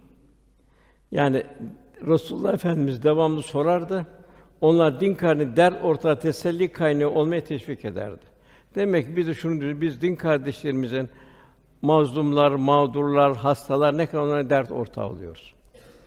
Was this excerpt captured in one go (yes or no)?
yes